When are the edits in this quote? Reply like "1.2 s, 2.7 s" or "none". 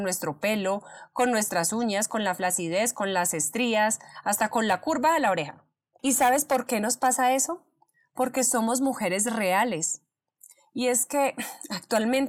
5.9 s

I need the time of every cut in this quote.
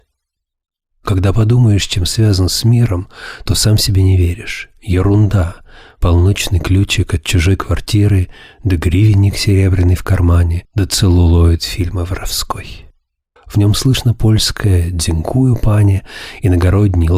13.4 s

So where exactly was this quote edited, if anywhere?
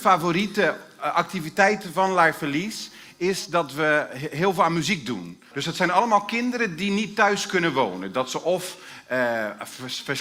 5.5 s

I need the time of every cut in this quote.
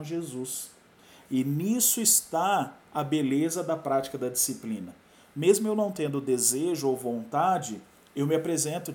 none

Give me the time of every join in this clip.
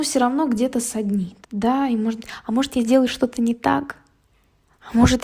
1.4 s

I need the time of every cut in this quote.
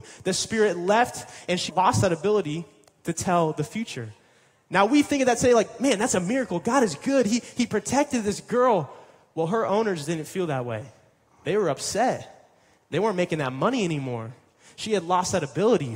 1.7 s

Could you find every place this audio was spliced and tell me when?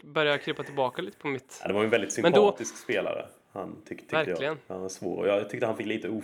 none

